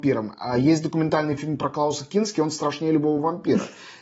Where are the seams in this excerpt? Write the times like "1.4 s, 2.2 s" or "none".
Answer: none